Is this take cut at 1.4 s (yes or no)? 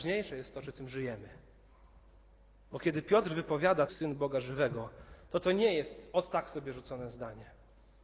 no